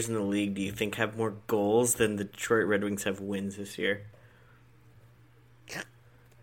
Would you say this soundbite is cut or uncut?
uncut